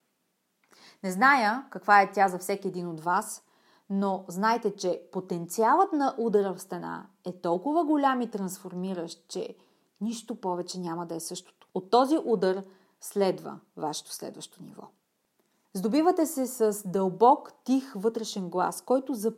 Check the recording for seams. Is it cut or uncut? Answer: cut